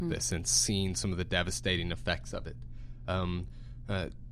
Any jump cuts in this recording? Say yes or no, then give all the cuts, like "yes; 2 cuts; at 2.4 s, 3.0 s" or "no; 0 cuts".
no; 0 cuts